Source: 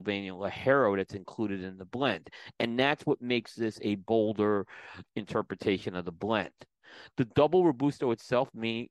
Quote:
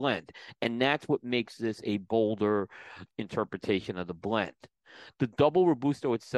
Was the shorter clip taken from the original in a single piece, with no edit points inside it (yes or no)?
yes